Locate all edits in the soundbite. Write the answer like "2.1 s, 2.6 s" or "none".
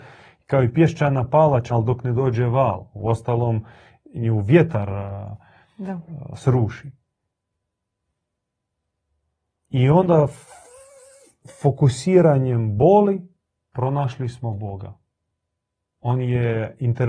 1.7 s